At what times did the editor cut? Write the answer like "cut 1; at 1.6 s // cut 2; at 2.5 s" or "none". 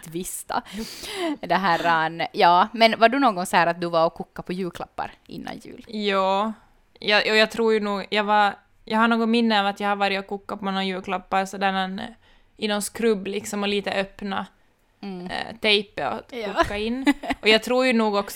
none